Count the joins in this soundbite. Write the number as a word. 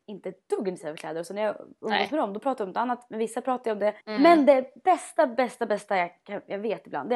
one